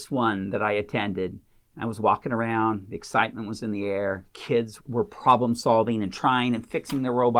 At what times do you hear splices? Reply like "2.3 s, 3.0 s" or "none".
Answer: 4.8 s